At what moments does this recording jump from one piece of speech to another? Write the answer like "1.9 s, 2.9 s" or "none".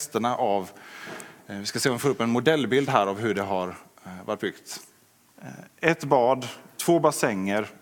none